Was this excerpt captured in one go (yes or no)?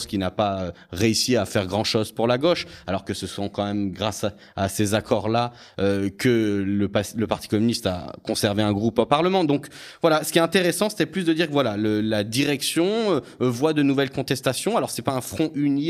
yes